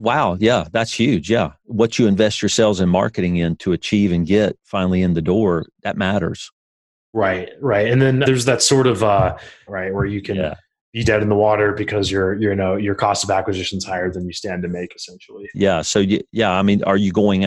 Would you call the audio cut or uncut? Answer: cut